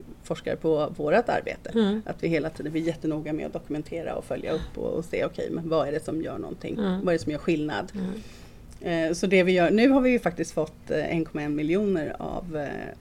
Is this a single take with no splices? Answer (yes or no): yes